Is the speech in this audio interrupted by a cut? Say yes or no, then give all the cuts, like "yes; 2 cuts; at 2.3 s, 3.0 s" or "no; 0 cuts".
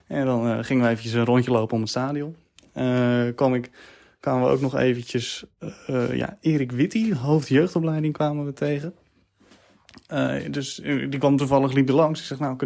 no; 0 cuts